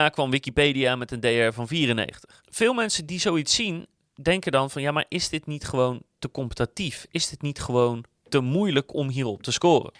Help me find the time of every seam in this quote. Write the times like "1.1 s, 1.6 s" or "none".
none